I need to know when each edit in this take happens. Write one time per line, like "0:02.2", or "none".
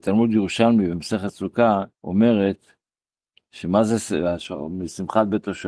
0:01.9